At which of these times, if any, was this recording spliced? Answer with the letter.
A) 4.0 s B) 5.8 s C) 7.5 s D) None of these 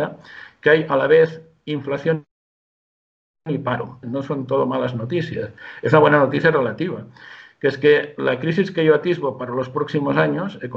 A